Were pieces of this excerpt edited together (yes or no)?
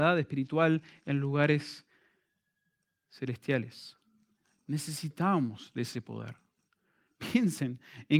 no